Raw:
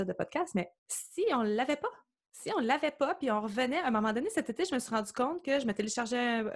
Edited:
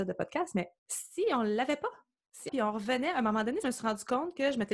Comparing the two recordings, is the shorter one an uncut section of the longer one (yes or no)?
no